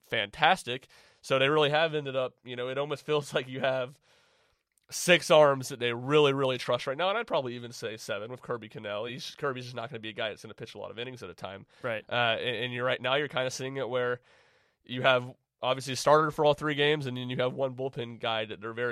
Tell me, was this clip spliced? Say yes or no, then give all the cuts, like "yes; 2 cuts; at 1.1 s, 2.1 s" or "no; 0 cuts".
no; 0 cuts